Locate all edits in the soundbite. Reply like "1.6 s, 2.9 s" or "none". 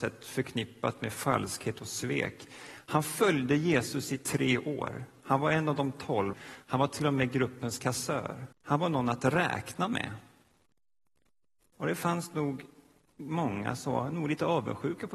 6.3 s, 8.5 s

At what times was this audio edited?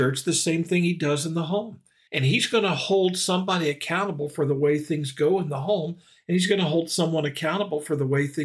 2.1 s

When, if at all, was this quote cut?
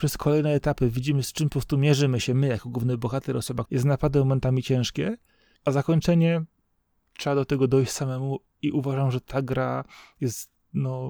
3.6 s

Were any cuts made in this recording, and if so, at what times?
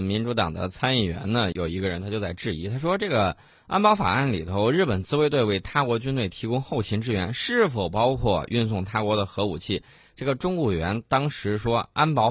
1.5 s

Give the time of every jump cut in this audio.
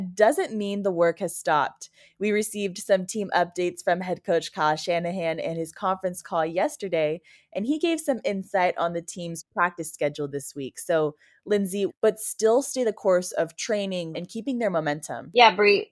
11.9 s, 14.1 s

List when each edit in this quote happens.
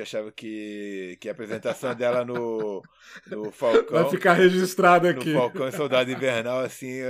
none

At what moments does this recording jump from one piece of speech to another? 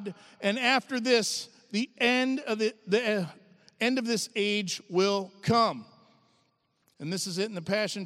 6.9 s

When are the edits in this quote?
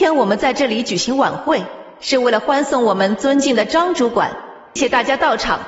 4.8 s

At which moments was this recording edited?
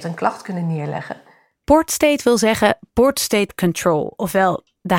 none

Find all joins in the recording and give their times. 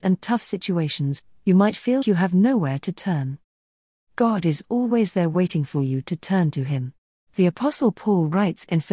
2.0 s, 7.3 s

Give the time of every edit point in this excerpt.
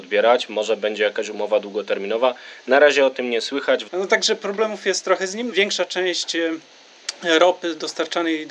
3.9 s, 5.5 s

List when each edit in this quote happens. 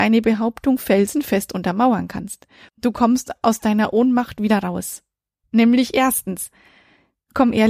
2.7 s, 5.4 s

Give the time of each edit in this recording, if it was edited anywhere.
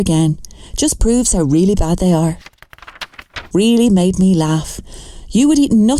3.5 s

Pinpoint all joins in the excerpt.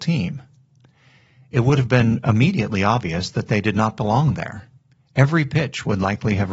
none

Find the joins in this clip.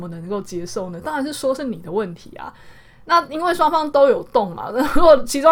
none

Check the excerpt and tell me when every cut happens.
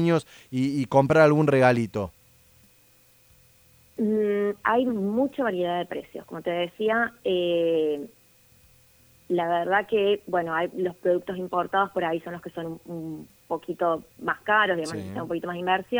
none

